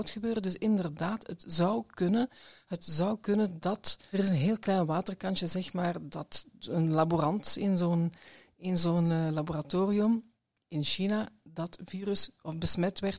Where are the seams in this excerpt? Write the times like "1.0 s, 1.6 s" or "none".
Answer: 4.1 s